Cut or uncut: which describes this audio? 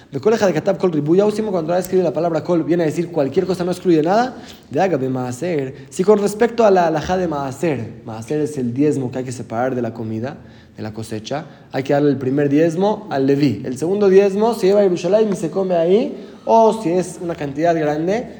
uncut